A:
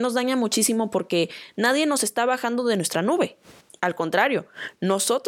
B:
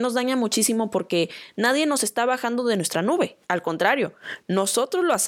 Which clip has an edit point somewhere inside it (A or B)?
B